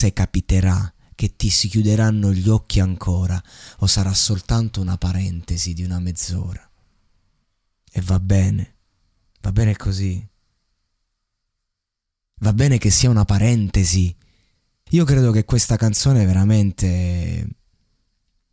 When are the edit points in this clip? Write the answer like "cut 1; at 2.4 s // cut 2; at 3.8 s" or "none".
cut 1; at 14.9 s